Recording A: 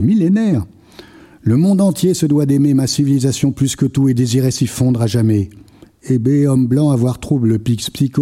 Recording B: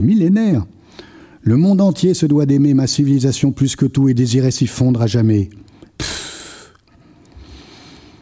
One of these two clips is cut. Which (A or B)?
B